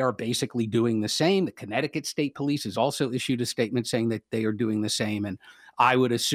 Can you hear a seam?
no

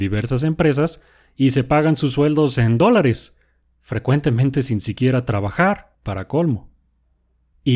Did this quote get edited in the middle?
no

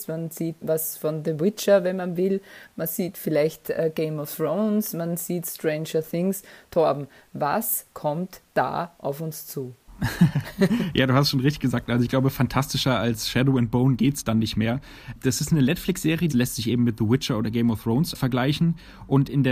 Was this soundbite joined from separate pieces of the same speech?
yes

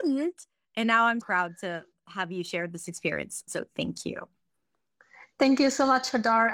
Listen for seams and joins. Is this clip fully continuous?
no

